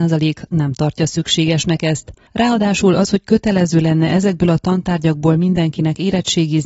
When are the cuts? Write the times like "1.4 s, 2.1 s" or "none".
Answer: 2.3 s